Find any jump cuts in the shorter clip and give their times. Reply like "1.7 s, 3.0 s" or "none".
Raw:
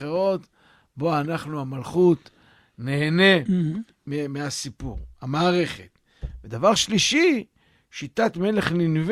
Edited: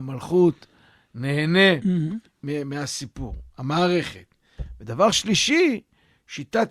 none